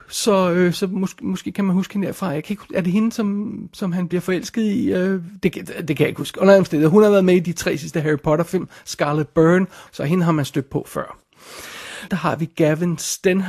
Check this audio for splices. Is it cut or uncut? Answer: cut